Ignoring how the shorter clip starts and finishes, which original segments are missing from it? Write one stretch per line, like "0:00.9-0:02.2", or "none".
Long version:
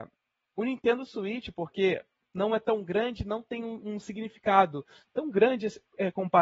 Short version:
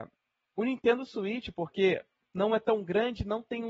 none